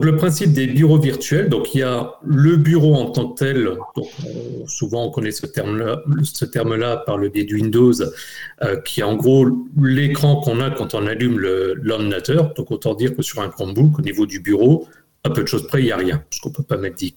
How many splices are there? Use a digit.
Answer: 0